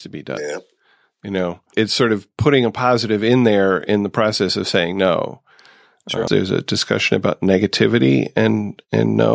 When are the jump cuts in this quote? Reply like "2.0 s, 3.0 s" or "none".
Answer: 1.7 s, 6.3 s